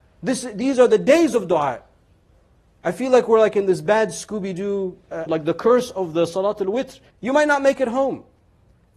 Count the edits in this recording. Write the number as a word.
two